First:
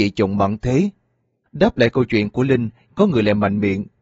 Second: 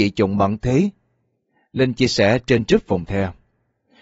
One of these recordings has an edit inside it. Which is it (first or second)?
first